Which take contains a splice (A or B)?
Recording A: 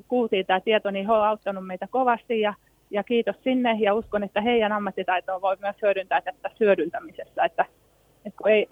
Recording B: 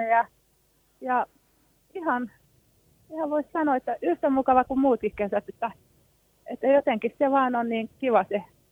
A